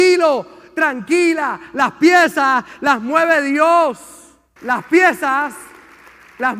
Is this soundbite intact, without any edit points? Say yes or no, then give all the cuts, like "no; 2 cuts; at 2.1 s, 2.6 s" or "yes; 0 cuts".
no; 1 cut; at 4.6 s